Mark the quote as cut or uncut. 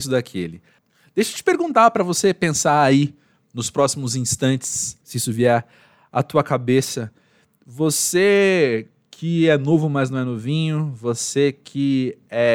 cut